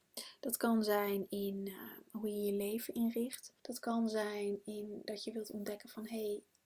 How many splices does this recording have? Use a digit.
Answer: 1